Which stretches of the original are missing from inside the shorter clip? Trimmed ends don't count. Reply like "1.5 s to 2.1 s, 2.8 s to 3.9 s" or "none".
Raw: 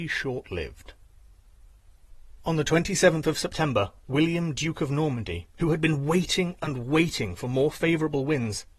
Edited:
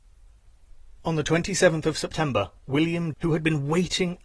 4.5 s to 5.5 s

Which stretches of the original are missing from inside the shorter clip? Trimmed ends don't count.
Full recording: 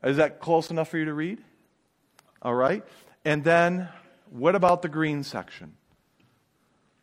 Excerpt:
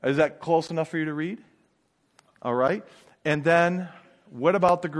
none

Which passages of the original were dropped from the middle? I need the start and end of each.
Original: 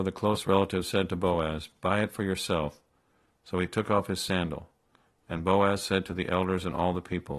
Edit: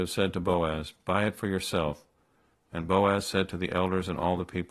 3.3 s to 5.1 s

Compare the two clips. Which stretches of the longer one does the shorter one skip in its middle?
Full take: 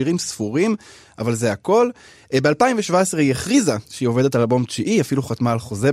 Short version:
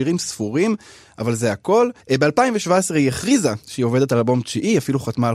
2.0 s to 2.2 s

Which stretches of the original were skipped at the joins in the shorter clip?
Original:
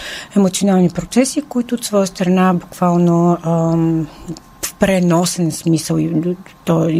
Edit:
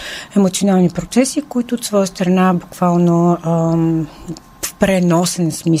none

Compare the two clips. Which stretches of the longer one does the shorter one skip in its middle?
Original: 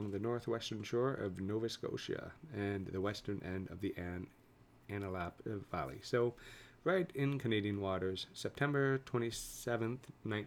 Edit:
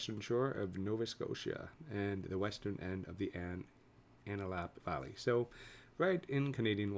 5.4 s to 5.7 s

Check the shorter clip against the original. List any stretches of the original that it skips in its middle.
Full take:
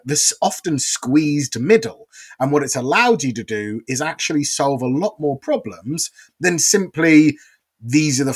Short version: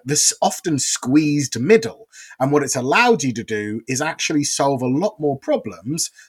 none

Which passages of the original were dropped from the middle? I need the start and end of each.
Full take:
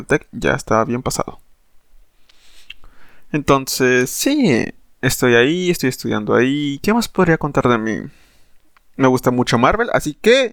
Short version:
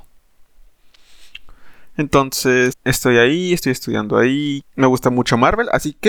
4.1 s to 4.9 s, 6.8 s to 8.8 s

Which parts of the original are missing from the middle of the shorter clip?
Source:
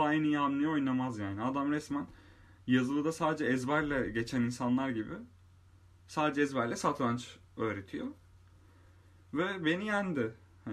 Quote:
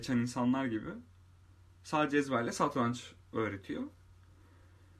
none

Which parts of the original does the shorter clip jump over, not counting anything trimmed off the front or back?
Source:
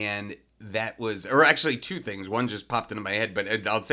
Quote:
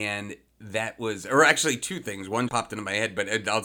2.5 s to 2.7 s

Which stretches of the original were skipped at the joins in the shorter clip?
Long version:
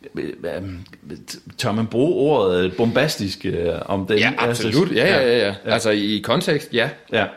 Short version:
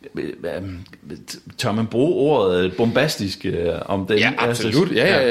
none

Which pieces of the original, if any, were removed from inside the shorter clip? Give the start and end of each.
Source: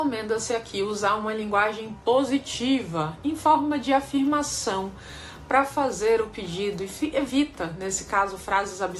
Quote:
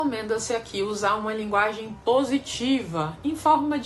none

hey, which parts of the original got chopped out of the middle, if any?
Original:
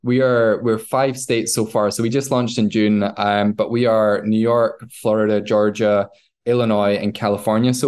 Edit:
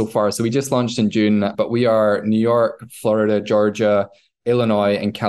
3.1 s to 3.5 s

